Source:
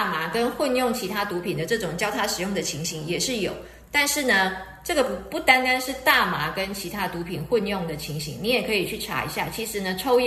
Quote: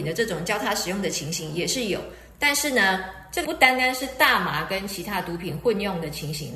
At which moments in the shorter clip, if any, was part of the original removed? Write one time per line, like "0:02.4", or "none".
0:03.4